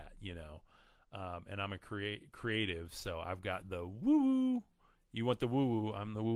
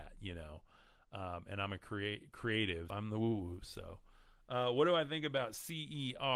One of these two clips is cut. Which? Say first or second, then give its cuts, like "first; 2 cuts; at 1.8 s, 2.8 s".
second; 1 cut; at 2.9 s